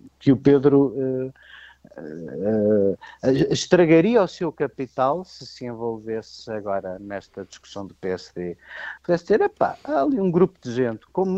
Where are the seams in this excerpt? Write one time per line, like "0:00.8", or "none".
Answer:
0:09.0